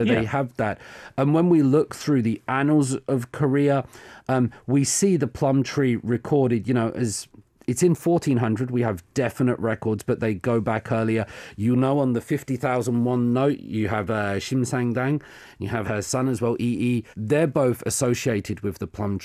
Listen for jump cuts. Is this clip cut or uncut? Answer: cut